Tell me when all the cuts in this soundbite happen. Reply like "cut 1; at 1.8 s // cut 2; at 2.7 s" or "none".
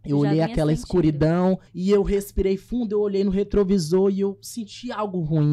cut 1; at 1.7 s